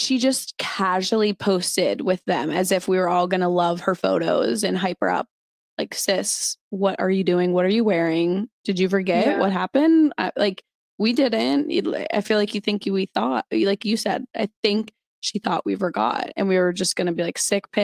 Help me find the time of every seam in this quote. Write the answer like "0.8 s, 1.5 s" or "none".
none

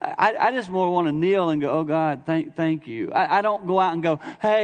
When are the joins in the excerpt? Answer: none

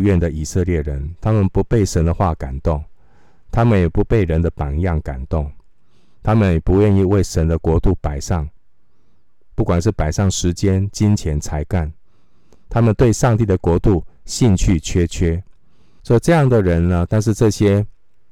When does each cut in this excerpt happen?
16.0 s, 17.1 s

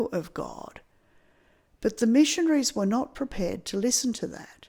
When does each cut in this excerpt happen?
none

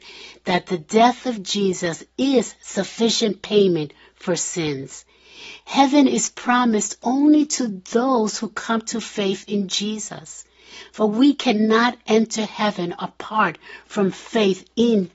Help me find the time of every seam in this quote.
5.6 s

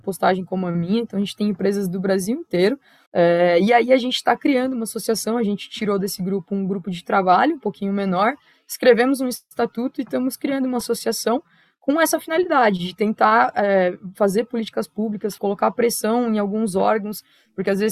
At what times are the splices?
3.1 s, 15.4 s

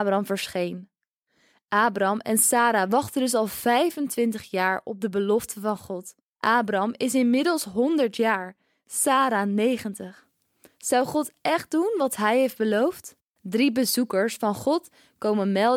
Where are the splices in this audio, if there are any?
13.3 s

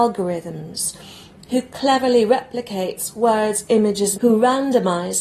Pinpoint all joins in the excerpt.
4.1 s

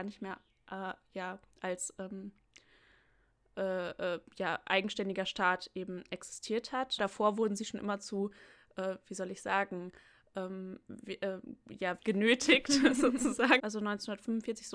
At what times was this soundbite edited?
7.0 s, 12.0 s, 13.6 s

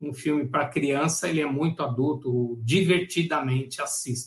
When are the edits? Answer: none

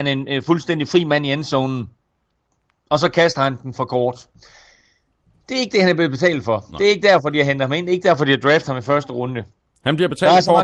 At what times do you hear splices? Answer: none

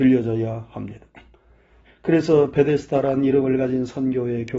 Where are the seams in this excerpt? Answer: 1.8 s

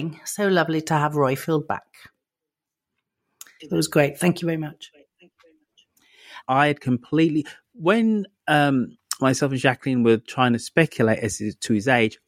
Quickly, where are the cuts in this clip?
3.6 s, 6.4 s

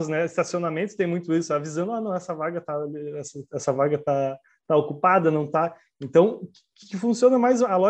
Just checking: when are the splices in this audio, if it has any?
none

